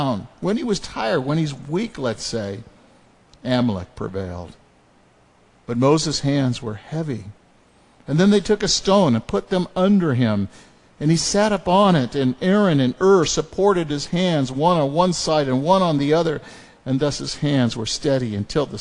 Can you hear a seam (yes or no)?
no